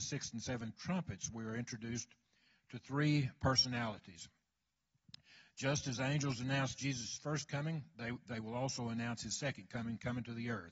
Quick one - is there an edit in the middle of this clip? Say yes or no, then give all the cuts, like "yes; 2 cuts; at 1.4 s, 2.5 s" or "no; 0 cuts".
no; 0 cuts